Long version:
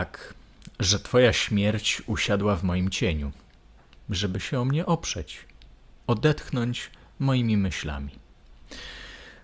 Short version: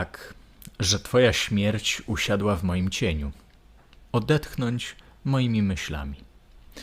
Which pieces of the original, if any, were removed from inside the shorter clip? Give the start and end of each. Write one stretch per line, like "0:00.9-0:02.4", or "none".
0:04.1-0:06.0